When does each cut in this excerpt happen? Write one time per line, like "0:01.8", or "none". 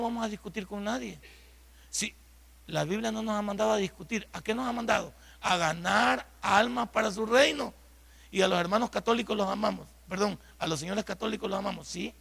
none